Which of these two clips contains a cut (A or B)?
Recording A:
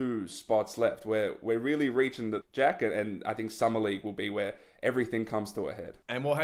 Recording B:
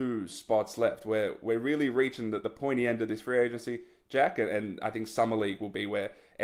A